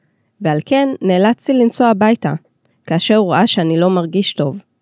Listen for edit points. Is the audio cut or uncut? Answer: cut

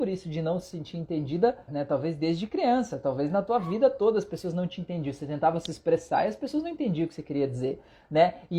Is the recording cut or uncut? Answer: cut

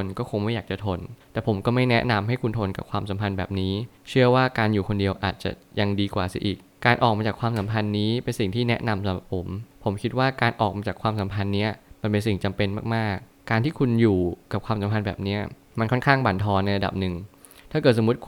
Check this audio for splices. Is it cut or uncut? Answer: uncut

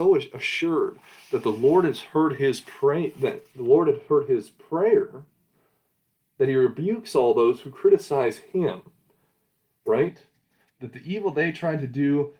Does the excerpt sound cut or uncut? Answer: uncut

